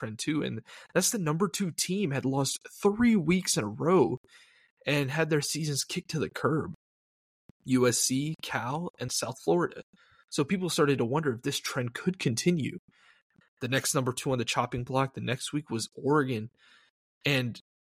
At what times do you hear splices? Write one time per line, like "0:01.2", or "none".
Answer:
0:09.1
0:13.4